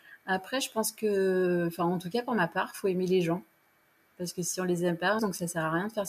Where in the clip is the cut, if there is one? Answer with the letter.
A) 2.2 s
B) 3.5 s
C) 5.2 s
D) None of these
C